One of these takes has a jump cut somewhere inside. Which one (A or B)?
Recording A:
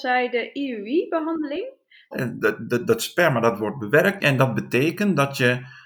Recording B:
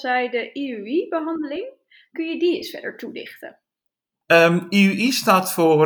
A